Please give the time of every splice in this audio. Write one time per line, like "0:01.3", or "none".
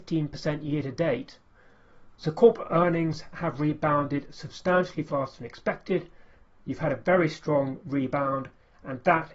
0:02.1